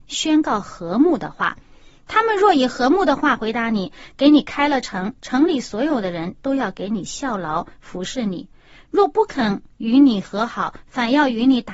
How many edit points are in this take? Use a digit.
0